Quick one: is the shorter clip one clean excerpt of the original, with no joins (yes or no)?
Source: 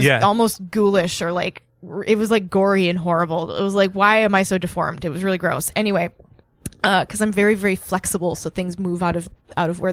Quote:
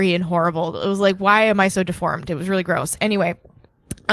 yes